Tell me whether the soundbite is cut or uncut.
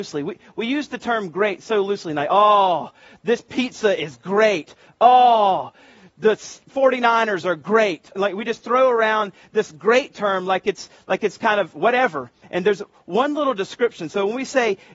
cut